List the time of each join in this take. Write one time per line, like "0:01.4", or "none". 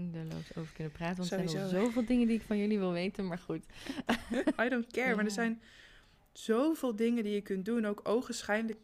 0:04.6

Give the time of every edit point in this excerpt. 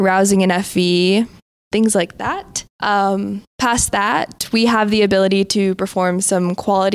0:02.7

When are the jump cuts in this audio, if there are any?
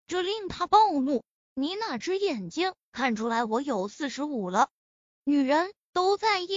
0:01.5

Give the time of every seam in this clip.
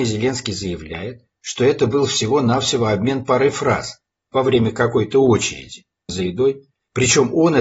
0:06.1

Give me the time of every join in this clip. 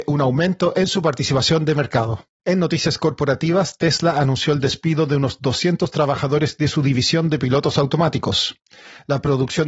0:02.3

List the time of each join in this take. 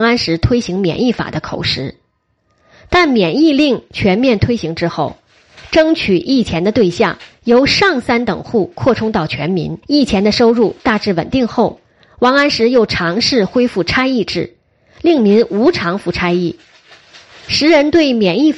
0:09.8

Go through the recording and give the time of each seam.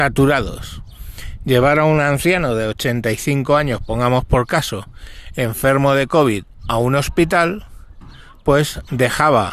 none

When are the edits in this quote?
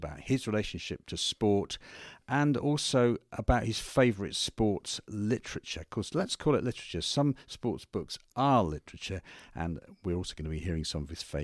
none

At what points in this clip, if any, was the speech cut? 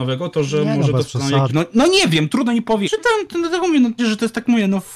0:01.5
0:02.8
0:04.0

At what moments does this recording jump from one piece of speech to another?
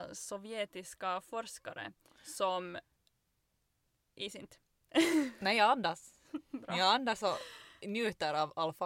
none

